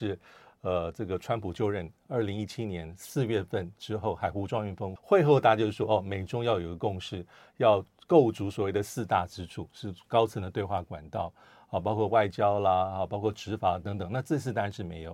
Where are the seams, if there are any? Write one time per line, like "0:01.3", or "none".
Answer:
0:05.0